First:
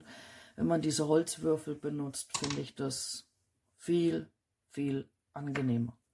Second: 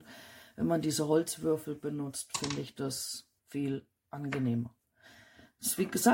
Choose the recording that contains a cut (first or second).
second